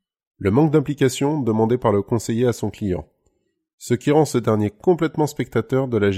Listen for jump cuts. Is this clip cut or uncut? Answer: uncut